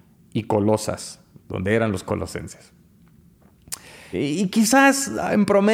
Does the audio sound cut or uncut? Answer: cut